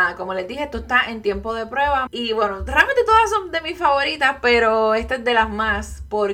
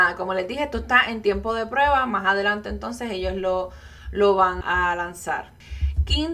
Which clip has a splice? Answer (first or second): first